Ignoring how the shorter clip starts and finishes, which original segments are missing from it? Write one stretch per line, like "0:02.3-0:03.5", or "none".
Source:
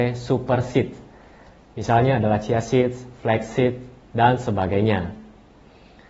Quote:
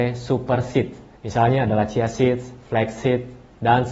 0:01.2-0:01.7